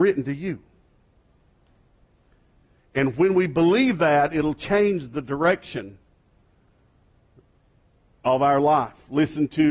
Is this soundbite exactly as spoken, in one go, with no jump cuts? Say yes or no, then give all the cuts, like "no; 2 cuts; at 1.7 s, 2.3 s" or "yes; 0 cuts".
yes; 0 cuts